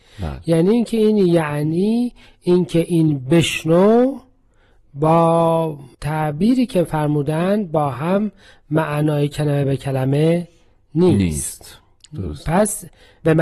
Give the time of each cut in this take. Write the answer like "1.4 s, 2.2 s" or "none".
5.9 s